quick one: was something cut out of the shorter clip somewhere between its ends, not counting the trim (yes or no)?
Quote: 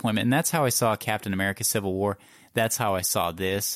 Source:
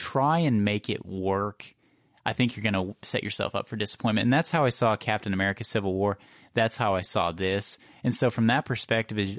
no